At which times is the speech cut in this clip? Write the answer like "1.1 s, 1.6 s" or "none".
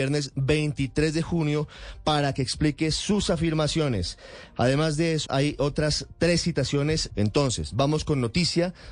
5.2 s, 7.1 s